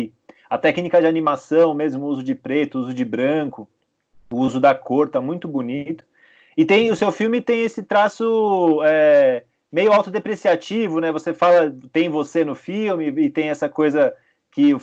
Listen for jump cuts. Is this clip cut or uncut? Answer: uncut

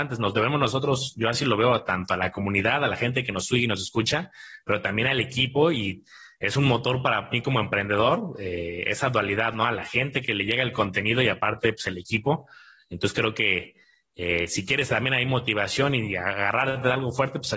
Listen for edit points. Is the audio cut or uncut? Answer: uncut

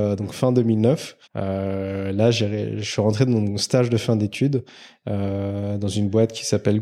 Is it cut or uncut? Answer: cut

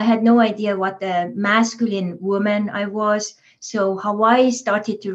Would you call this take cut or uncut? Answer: uncut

